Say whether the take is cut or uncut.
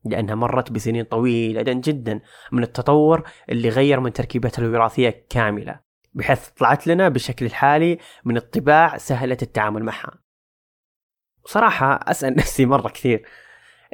cut